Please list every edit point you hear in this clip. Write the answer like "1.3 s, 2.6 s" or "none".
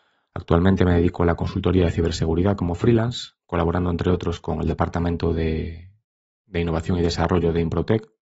none